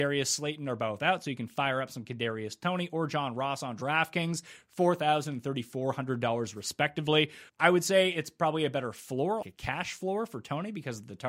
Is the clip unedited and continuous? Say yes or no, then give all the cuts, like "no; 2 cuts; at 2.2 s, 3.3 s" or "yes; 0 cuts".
no; 2 cuts; at 7.5 s, 9.4 s